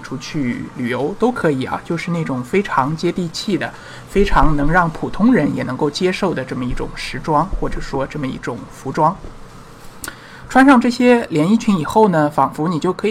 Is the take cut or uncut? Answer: uncut